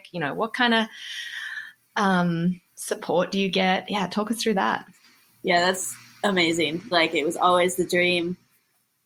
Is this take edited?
yes; 2 cuts; at 2.7 s, 6.9 s

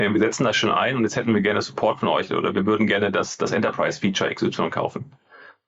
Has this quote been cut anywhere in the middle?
no; 0 cuts

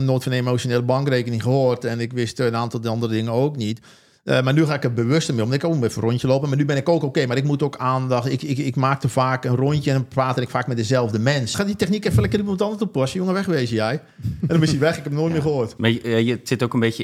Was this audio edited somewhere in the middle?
yes; 2 cuts; at 11.5 s, 15.8 s

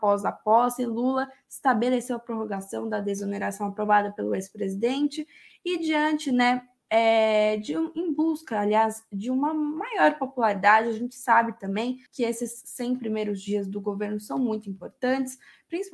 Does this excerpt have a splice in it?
yes; 1 cut; at 12.1 s

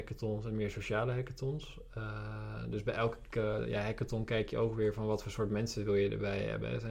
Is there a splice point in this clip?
no; 0 cuts

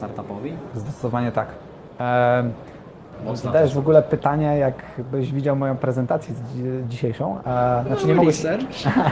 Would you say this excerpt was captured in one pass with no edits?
yes; 0 cuts

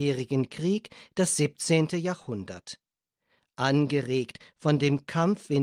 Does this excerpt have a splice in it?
no; 0 cuts

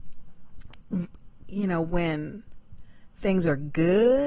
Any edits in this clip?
yes; 1 cut; at 1.4 s

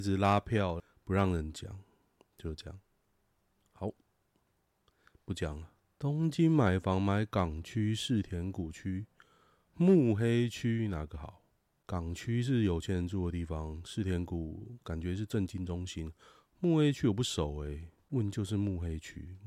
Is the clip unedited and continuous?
yes; 0 cuts

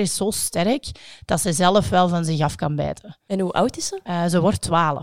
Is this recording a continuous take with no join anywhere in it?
yes; 0 cuts

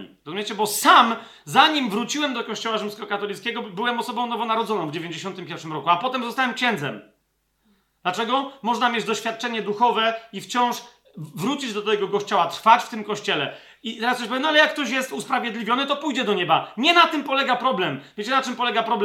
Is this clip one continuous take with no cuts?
yes; 0 cuts

